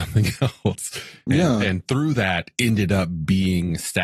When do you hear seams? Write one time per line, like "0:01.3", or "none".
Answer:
0:02.5

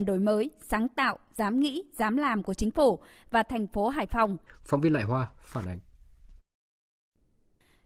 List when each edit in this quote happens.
0:04.5

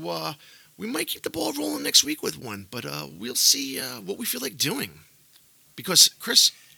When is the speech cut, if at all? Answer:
none

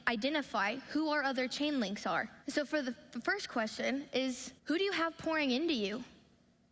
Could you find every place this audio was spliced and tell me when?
0:02.4
0:04.6

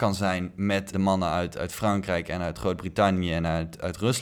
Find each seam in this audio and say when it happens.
0:00.9

